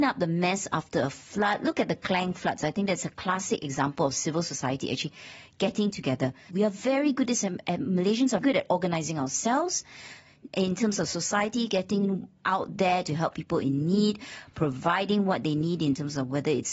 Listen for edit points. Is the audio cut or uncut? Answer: cut